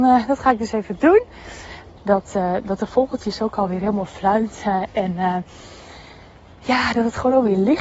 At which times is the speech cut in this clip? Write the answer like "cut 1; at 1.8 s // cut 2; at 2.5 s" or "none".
cut 1; at 2.0 s